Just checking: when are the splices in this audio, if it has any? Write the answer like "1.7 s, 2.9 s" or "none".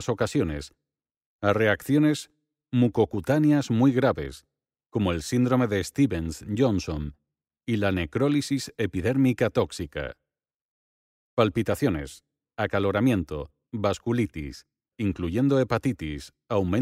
12.5 s, 13.7 s, 14.9 s